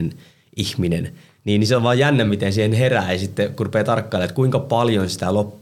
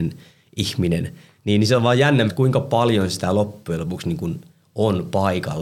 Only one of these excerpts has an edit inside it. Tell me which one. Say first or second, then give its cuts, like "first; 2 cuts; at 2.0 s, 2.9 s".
second; 1 cut; at 2.3 s